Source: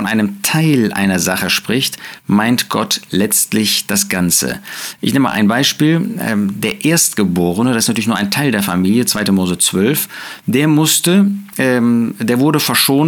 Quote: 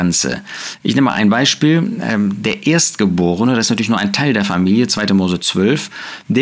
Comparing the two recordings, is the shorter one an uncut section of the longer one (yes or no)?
yes